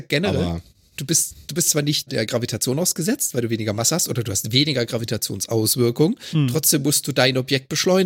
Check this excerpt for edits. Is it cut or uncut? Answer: cut